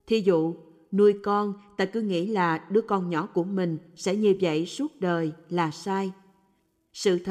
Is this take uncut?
yes; 0 cuts

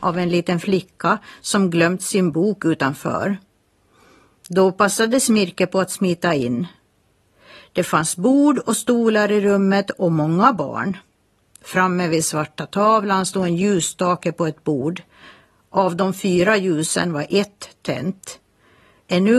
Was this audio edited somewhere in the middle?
no; 0 cuts

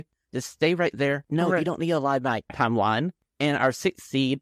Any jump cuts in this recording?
yes; 1 cut; at 2.5 s

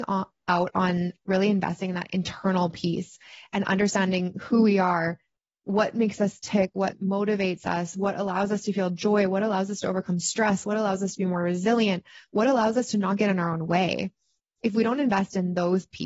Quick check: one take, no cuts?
yes; 0 cuts

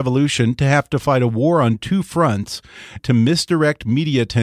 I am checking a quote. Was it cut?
yes; 1 cut; at 3.0 s

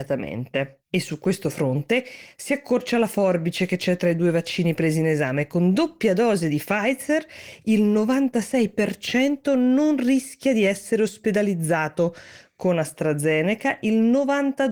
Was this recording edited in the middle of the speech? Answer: no; 0 cuts

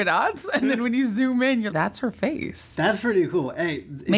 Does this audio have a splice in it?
yes; 1 cut; at 1.7 s

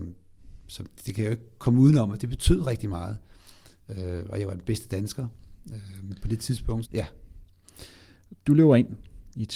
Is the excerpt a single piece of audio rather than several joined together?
no; 1 cut; at 6.8 s

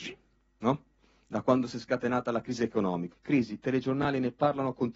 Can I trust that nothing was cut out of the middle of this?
no; 1 cut; at 3.1 s

